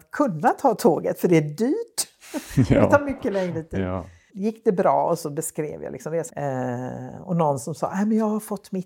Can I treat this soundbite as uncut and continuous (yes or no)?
no